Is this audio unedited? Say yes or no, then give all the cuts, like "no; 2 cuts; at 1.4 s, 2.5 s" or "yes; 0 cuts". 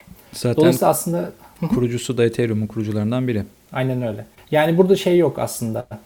no; 1 cut; at 3.7 s